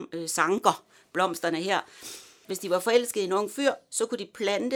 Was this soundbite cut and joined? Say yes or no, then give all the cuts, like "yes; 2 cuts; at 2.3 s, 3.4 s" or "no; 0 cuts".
yes; 1 cut; at 2.4 s